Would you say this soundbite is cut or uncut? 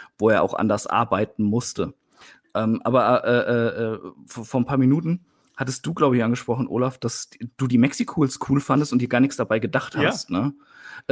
uncut